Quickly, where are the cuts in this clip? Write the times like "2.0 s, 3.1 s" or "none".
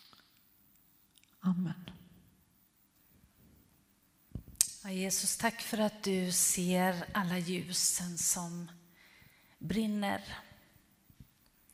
none